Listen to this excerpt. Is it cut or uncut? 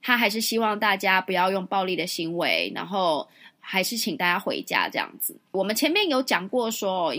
uncut